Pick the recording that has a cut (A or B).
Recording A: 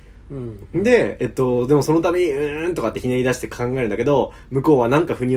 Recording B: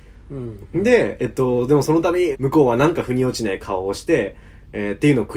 B